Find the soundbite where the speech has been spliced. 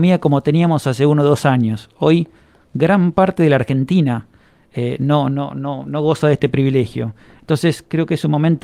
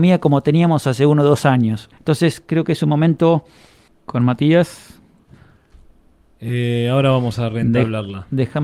second; 2 cuts; at 1.9 s, 3.9 s

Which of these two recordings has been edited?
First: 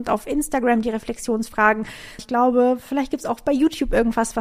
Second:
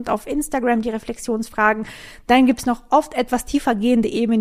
first; 1 cut; at 2.2 s

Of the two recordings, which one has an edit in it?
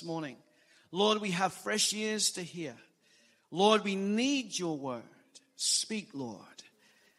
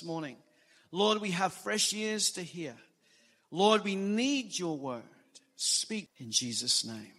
second; 1 cut; at 6.1 s

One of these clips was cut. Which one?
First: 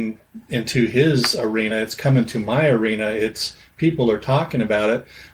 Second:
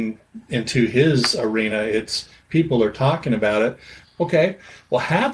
second; 2 cuts; at 1.7 s, 4.0 s

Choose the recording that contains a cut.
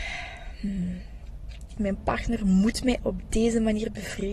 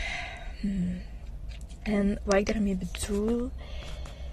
first; 1 cut; at 1.8 s

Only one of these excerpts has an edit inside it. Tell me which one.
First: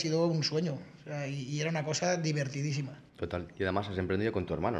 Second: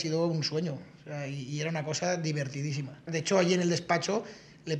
second; 1 cut; at 3.1 s

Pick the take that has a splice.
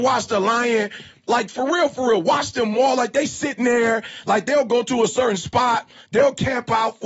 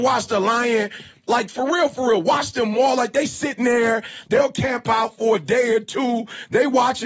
second; 1 cut; at 4.2 s

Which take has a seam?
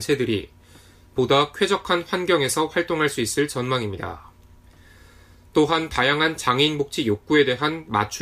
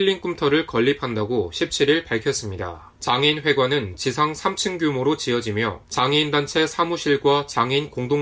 second; 2 cuts; at 3.0 s, 5.8 s

